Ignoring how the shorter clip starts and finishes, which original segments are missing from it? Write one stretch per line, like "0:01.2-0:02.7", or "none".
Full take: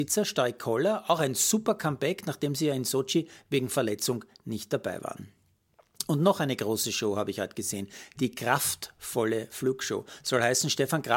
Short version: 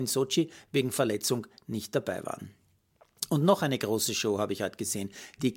none